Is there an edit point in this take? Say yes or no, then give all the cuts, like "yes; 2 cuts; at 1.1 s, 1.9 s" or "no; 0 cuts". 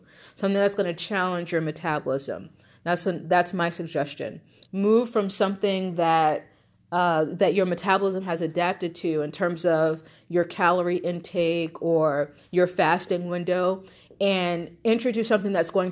yes; 1 cut; at 4.7 s